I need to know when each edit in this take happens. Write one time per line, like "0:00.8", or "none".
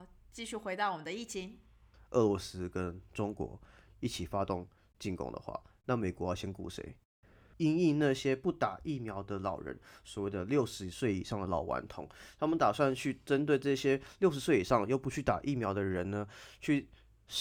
0:01.9
0:07.5